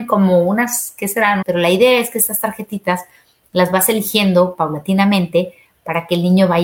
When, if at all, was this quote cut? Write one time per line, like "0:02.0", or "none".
0:01.4